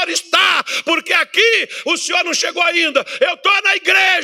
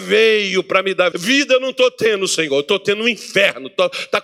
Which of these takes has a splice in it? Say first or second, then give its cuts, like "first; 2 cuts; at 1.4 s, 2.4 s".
second; 1 cut; at 1.1 s